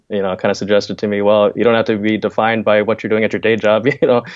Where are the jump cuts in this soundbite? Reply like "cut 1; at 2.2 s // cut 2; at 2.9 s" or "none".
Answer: cut 1; at 1.5 s